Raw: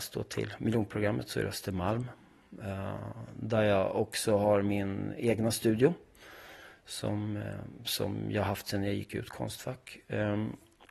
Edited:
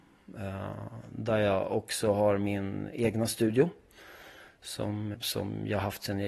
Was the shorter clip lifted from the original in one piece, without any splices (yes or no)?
no